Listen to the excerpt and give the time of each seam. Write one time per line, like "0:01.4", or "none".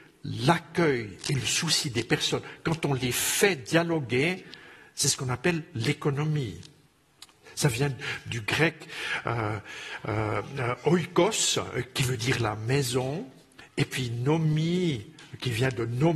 none